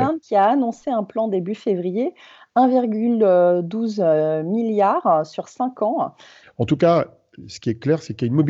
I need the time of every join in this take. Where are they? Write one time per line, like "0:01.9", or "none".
0:06.4